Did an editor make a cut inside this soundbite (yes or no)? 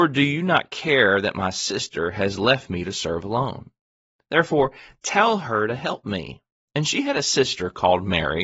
yes